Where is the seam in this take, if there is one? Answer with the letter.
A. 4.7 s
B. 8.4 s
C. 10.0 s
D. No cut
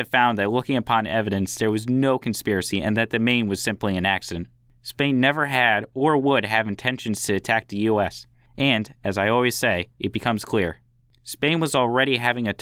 C